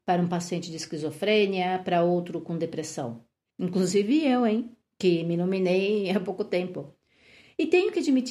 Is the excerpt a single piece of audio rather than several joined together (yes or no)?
no